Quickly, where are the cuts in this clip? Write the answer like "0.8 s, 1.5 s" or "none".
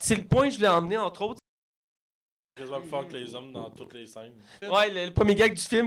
2.6 s, 4.6 s